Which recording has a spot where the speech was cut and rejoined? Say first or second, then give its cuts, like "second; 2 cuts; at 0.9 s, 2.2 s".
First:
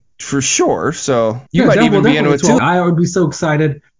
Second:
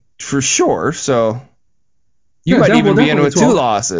first; 2 cuts; at 1.5 s, 2.6 s